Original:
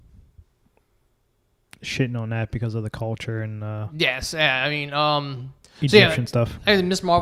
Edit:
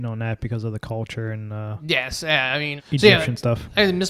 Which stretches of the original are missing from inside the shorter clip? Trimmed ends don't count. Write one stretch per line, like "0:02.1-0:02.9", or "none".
0:04.9-0:05.7